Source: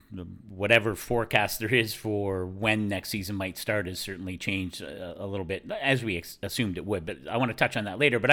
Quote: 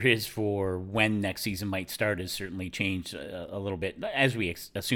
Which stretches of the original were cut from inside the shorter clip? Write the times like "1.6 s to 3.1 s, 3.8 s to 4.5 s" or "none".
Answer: none